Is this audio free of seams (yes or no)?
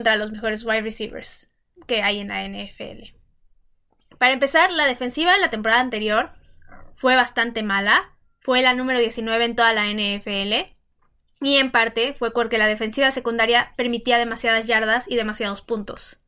yes